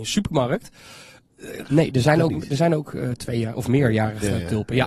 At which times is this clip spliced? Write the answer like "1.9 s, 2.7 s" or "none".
1.6 s